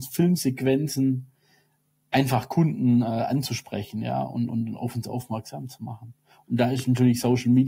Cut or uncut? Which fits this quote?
uncut